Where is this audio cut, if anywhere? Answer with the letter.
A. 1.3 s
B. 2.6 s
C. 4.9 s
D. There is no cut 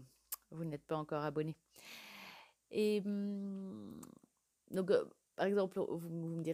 D